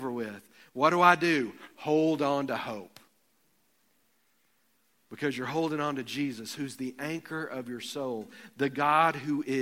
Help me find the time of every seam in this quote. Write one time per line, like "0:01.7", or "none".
none